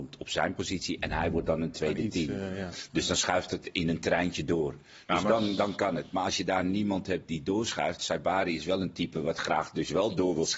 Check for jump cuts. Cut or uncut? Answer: uncut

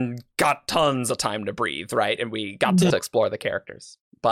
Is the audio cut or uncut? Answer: cut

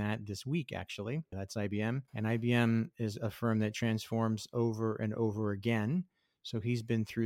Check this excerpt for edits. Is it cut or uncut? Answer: cut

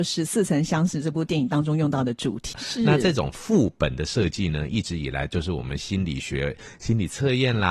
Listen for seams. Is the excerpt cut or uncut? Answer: cut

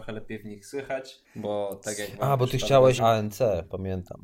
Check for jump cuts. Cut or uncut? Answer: cut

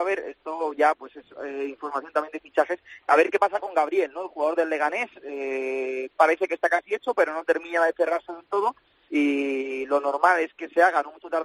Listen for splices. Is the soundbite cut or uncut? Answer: uncut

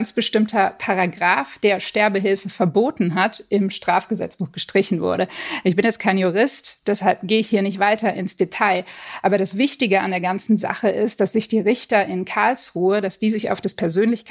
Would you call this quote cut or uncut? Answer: uncut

